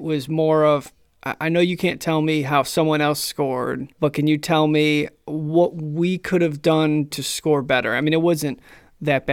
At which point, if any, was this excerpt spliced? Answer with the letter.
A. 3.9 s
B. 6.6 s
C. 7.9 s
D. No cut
A